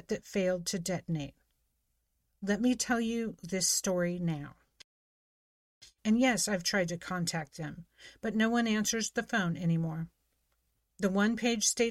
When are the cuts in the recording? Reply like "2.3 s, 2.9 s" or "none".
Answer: 6.0 s